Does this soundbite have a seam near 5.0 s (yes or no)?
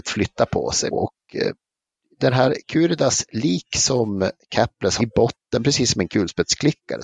yes